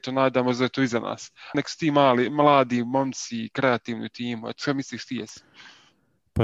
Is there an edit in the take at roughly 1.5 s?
yes; 1 cut; at 1.5 s

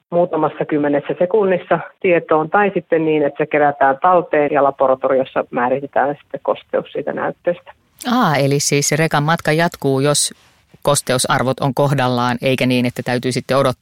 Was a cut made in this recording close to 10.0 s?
no; 1 cut; at 4.5 s

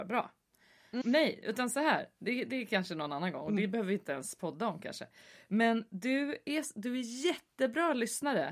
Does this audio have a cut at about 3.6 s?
no; 1 cut; at 1.0 s

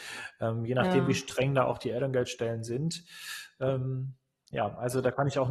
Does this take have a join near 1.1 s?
no; 0 cuts

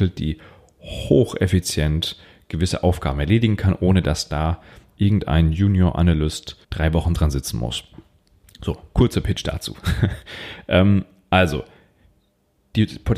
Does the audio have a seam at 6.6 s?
yes; 1 cut; at 6.6 s

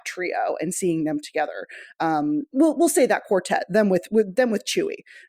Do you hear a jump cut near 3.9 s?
no; 0 cuts

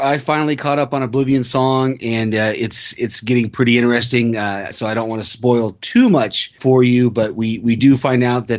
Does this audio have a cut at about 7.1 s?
no; 1 cut; at 4.7 s

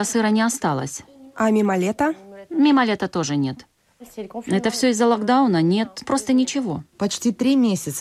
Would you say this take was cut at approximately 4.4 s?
no; 1 cut; at 6.0 s

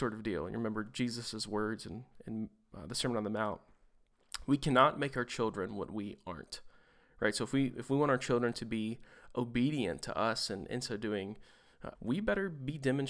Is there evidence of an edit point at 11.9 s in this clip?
yes; 1 cut; at 11.9 s

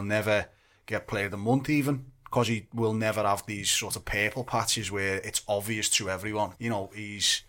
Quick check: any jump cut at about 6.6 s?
yes; 1 cut; at 6.6 s

